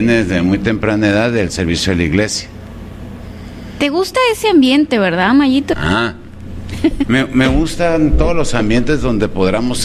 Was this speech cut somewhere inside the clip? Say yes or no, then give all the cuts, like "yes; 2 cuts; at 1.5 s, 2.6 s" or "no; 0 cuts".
yes; 2 cuts; at 5.7 s, 7.0 s